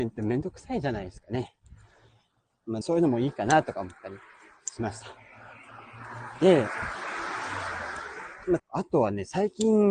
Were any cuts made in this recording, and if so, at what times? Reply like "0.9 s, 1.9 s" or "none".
2.8 s, 8.6 s